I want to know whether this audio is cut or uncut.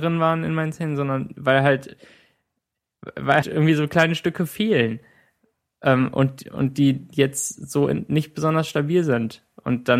cut